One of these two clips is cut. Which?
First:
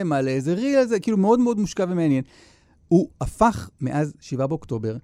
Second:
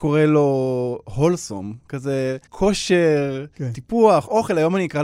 second; 1 cut; at 2.5 s

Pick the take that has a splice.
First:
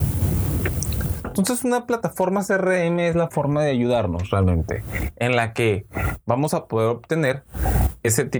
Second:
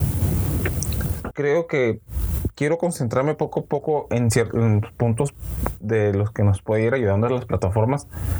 second; 1 cut; at 1.3 s

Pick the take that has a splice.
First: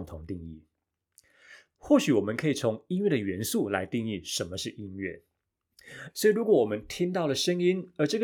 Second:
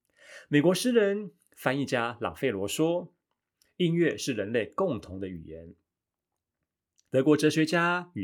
first; 1 cut; at 6.1 s

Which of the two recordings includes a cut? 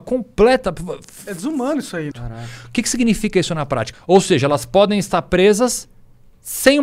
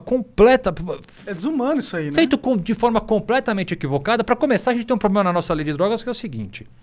first; 2 cuts; at 2.1 s, 3.9 s

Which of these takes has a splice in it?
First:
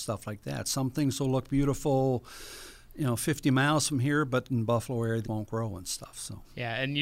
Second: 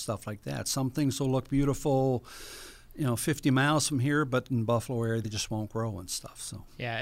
first; 1 cut; at 5.2 s

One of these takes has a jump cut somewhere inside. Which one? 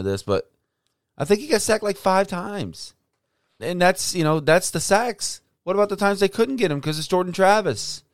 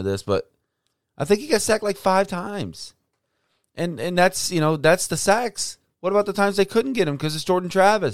first; 1 cut; at 3.6 s

